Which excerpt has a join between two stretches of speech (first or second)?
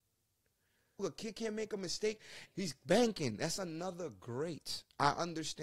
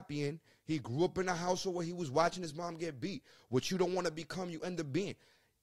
first